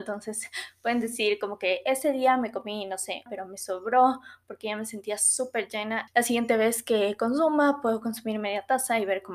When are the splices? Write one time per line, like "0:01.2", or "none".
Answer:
0:03.3
0:06.1

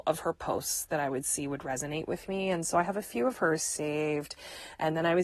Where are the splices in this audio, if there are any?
none

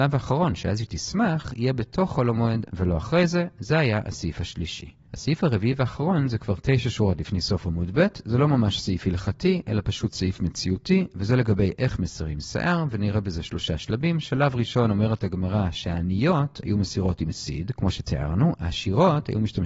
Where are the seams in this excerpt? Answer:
0:05.1

